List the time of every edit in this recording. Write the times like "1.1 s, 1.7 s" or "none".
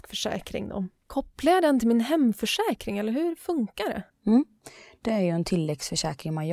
1.0 s